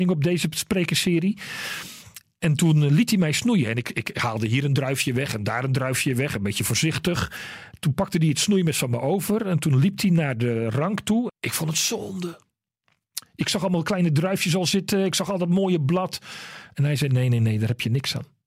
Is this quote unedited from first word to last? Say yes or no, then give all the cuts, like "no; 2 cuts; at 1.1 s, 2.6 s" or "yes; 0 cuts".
no; 1 cut; at 11.3 s